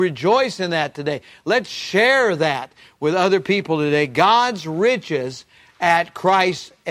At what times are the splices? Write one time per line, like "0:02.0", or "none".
none